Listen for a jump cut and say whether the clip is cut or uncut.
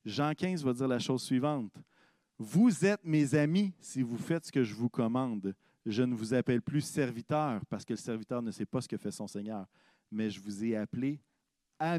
uncut